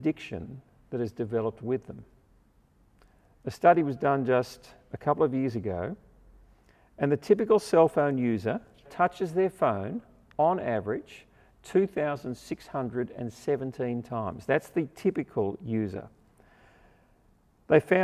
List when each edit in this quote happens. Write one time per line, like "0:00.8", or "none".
0:08.8